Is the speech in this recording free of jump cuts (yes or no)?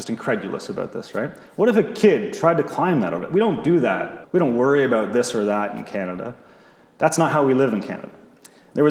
no